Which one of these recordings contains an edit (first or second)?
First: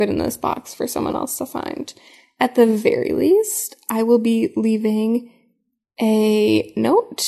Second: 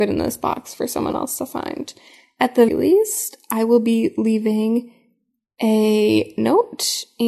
second